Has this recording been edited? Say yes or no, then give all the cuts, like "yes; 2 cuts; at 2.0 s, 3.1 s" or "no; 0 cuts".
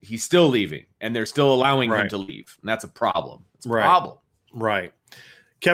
no; 0 cuts